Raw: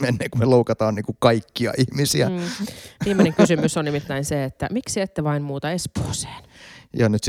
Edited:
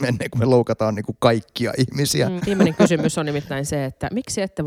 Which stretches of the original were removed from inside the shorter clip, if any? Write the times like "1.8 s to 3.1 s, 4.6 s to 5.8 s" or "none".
2.4 s to 3.0 s